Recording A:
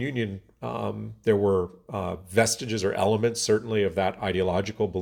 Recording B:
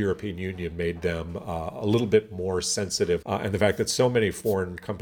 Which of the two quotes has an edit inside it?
B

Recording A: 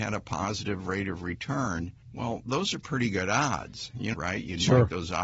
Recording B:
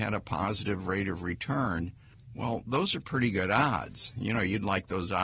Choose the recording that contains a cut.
A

